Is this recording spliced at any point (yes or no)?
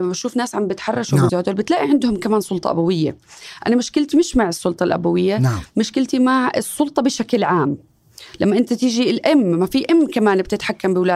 yes